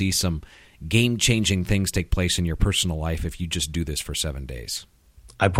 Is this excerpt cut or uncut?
uncut